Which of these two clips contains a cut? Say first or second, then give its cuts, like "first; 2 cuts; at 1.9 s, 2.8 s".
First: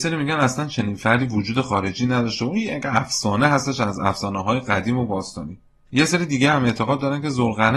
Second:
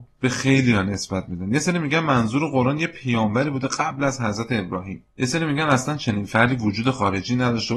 second; 1 cut; at 5.1 s